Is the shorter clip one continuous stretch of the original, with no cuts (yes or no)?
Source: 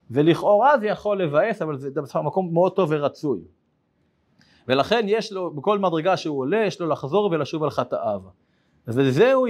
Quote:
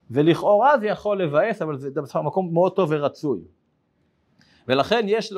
yes